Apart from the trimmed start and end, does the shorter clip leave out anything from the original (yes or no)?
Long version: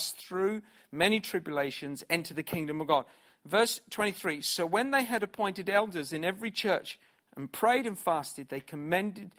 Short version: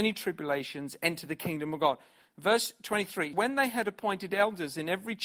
yes